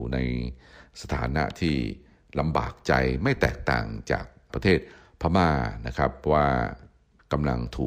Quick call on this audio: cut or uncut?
uncut